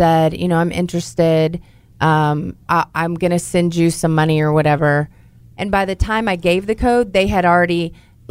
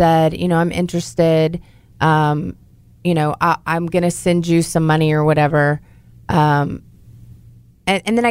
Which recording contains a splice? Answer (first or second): first